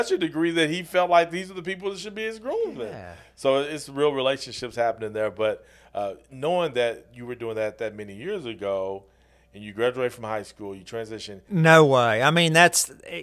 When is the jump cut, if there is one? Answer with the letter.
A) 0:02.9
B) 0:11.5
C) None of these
B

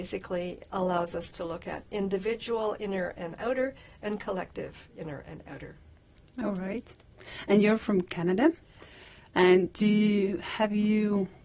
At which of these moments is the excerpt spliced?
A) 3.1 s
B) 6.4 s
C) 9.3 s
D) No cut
D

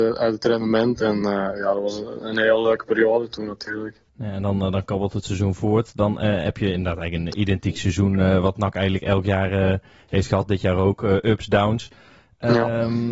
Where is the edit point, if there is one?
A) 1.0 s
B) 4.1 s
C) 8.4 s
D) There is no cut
B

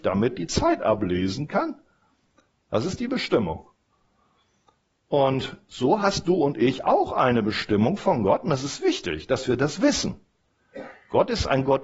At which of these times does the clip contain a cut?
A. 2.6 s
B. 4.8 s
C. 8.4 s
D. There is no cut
D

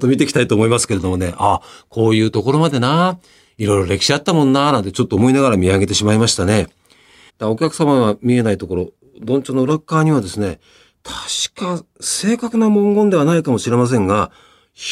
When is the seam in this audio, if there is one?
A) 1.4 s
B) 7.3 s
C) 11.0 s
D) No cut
B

